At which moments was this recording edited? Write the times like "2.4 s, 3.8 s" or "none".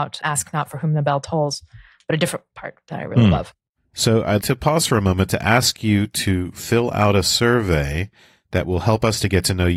4.4 s